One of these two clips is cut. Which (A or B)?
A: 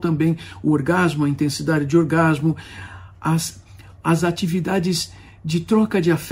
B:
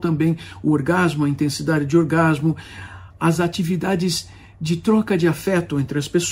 B